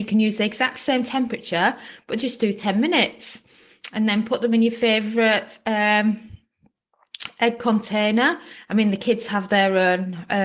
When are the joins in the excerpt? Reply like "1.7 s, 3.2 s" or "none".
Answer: none

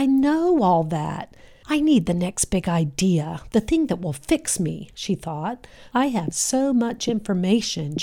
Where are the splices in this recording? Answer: 1.6 s, 5.9 s

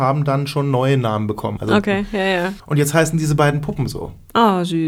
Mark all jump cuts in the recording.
1.6 s, 2.6 s

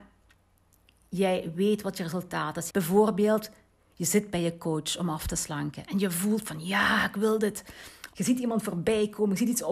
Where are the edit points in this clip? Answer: 2.7 s, 8.1 s

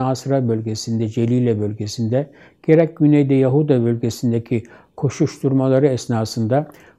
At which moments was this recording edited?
none

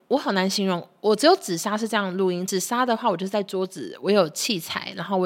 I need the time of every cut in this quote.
none

